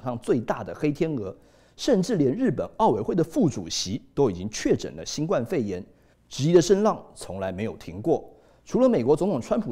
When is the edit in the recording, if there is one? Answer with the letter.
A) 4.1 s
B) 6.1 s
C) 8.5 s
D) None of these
B